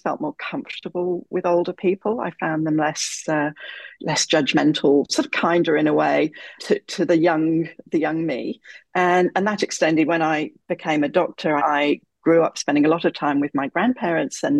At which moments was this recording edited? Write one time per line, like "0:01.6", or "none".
0:06.6
0:11.6